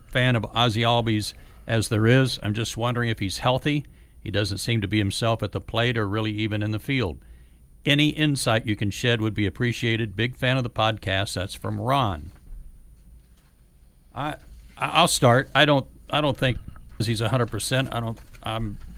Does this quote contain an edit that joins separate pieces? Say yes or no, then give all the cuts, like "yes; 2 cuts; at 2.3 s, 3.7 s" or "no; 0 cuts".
yes; 2 cuts; at 15.6 s, 17.0 s